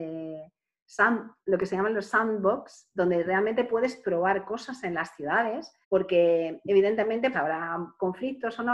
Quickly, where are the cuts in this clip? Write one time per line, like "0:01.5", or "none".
0:05.8
0:07.3